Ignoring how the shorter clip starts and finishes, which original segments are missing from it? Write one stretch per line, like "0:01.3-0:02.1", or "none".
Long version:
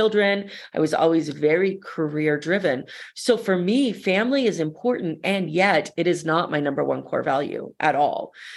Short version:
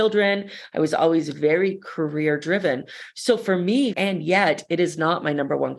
0:03.9-0:05.2

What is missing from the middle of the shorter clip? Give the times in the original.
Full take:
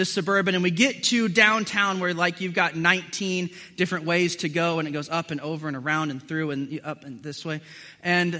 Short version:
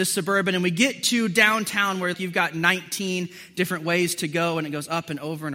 0:02.1-0:02.3

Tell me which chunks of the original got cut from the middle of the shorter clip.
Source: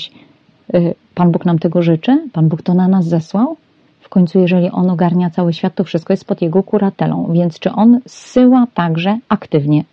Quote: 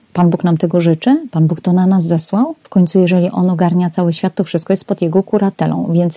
0:03.7-0:04.0

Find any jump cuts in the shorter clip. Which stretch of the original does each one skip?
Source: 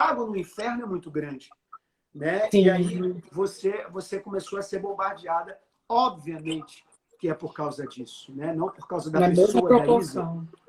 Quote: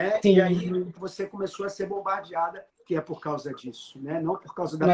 0:03.2-0:03.9
0:05.6-0:07.0

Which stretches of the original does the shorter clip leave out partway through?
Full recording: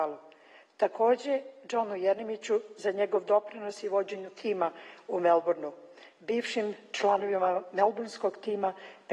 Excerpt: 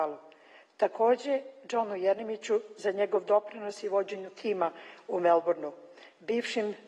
none

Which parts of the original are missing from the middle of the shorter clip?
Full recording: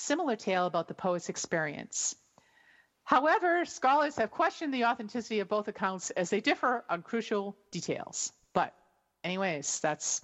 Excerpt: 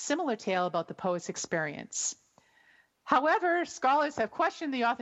none

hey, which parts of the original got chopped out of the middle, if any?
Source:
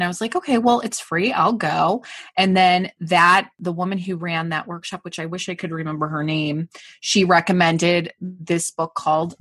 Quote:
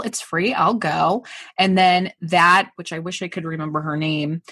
0:03.5-0:05.0

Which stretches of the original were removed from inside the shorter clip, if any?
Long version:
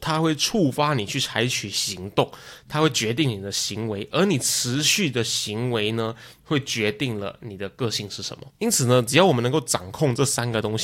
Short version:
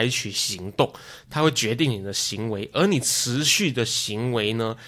none

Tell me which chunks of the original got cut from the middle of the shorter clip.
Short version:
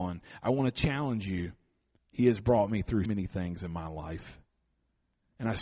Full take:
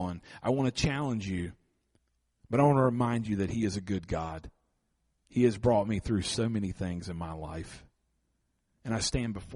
0:02.1-0:05.2
0:06.2-0:06.5

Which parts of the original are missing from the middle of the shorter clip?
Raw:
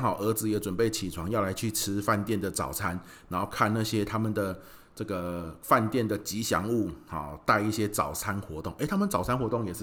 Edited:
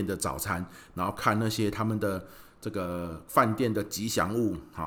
none

